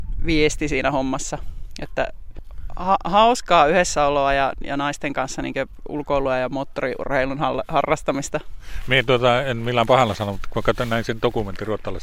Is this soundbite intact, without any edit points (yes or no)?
yes